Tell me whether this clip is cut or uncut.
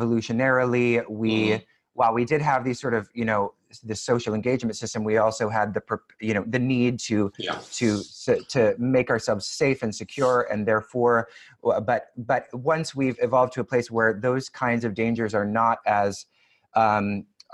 uncut